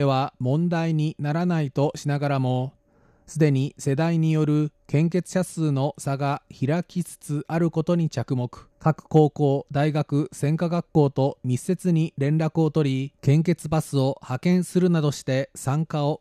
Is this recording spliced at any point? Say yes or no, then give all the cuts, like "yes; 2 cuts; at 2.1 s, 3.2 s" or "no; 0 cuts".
yes; 2 cuts; at 8.7 s, 13.2 s